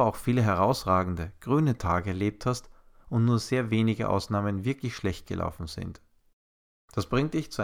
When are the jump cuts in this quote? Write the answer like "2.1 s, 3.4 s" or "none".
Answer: 6.7 s